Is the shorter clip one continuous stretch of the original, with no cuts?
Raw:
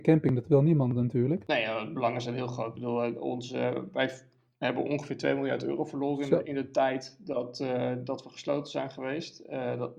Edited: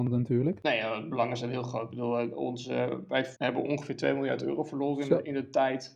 no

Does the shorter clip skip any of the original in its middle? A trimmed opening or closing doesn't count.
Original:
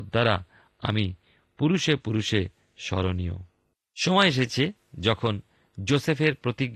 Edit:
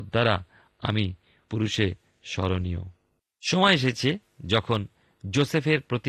yes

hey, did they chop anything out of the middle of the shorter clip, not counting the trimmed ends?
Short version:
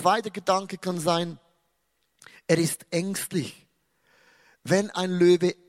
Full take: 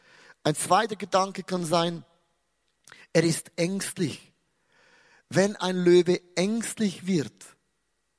no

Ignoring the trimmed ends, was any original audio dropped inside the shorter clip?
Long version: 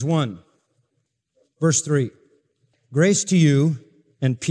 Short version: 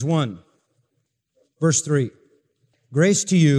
no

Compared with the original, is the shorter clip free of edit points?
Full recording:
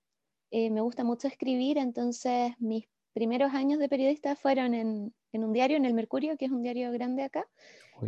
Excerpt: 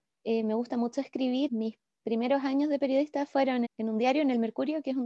no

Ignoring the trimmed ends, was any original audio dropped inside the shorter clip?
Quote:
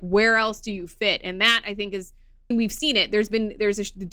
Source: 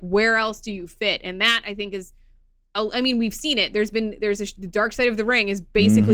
yes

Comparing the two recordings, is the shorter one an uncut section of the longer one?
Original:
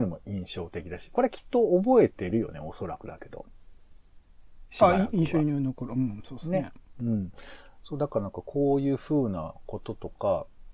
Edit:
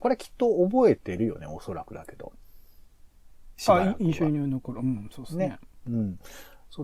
yes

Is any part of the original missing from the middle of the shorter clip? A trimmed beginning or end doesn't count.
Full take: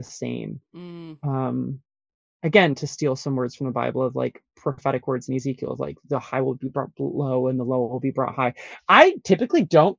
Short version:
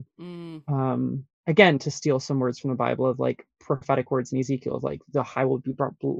yes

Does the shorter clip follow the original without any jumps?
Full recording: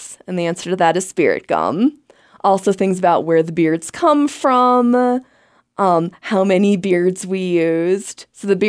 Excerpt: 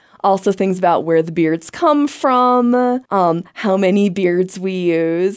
no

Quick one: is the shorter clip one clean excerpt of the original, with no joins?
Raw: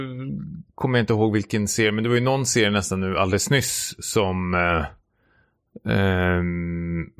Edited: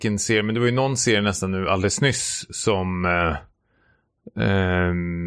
yes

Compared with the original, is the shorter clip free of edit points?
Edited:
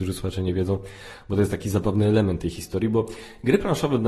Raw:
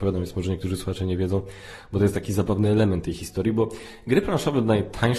yes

